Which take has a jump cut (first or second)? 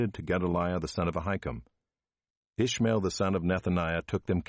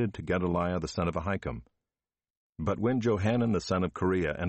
second